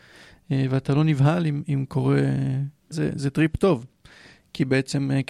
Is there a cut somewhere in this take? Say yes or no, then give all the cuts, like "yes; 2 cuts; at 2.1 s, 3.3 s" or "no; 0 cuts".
yes; 1 cut; at 2.9 s